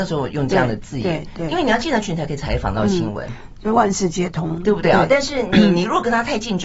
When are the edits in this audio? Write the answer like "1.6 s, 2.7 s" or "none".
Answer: none